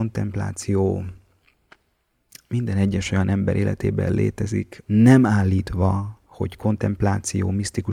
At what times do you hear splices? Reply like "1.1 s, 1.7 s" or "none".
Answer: 4.8 s, 6.3 s